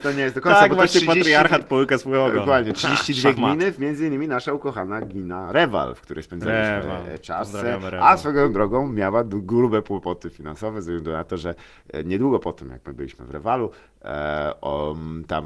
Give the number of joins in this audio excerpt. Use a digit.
0